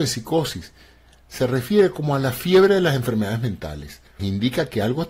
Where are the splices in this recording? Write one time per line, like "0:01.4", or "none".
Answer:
0:04.2